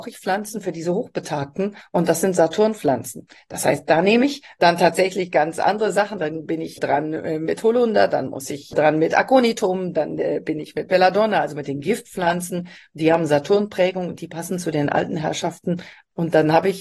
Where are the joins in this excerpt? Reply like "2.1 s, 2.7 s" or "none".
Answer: none

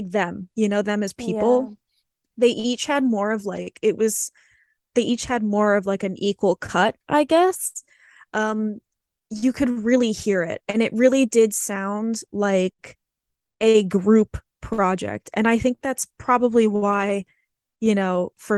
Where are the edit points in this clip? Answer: none

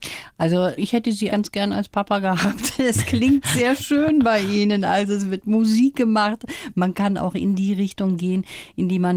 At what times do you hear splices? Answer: 1.3 s

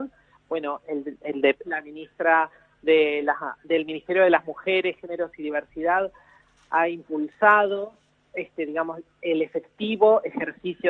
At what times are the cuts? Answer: 1.6 s

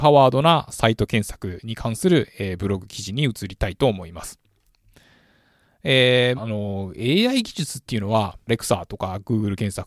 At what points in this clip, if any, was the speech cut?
6.4 s, 8.5 s

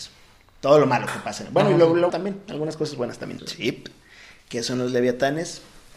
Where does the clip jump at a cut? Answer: 2.1 s, 3.4 s

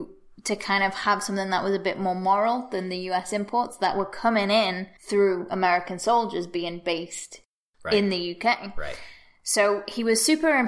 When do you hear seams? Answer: 5.0 s

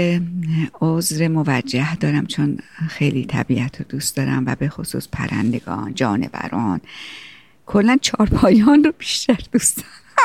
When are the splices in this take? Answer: 5.9 s

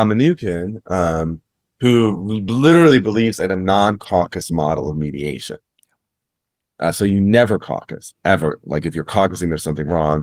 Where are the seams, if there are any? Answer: none

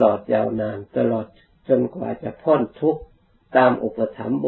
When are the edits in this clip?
none

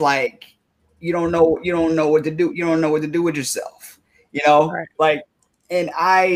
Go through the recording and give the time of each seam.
none

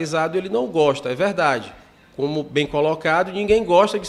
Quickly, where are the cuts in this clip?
none

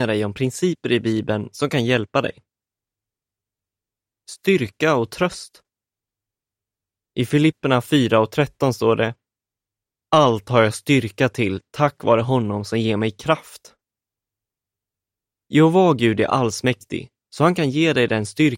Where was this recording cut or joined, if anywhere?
none

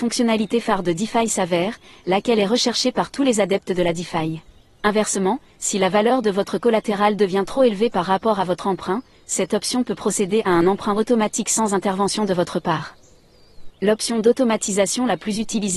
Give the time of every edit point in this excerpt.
4.8 s, 13.7 s

